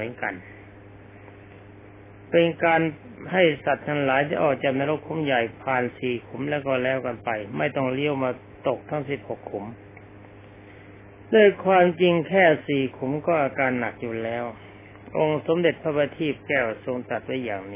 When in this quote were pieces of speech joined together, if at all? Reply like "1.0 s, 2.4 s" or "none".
none